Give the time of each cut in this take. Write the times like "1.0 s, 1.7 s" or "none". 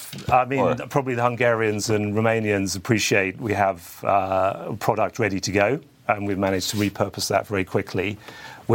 none